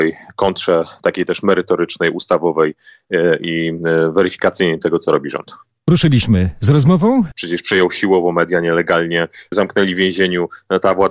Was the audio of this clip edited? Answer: yes; 2 cuts; at 7.3 s, 9.5 s

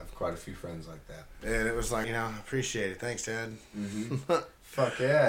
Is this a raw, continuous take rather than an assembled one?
no; 1 cut; at 2.0 s

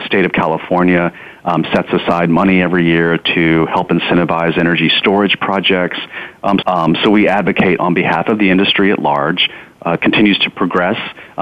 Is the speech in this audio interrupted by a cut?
yes; 2 cuts; at 6.6 s, 10.0 s

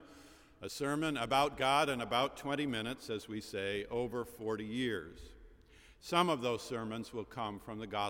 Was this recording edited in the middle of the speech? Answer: no; 0 cuts

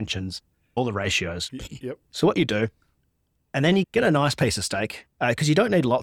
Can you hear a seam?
no; 0 cuts

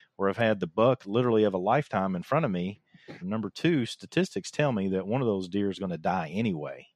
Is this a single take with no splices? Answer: no; 1 cut; at 3.2 s

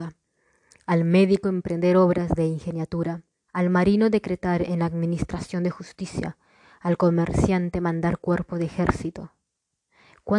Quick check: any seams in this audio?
yes; 1 cut; at 3.5 s

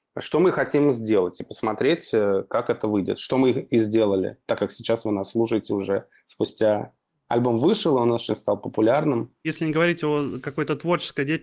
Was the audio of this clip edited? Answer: no; 0 cuts

